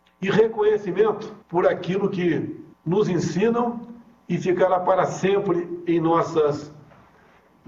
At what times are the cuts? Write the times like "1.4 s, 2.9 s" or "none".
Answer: 1.4 s, 2.7 s